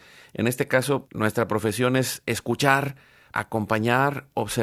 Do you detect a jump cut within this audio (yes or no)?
yes